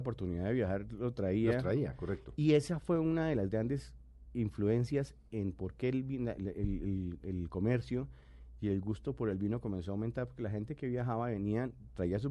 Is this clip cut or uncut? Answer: uncut